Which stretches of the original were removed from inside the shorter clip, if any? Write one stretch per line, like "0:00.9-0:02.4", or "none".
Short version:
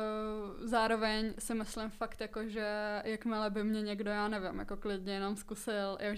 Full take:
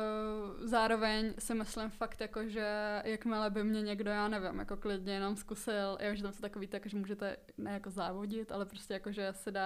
none